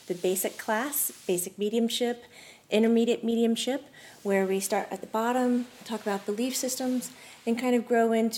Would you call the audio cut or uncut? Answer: uncut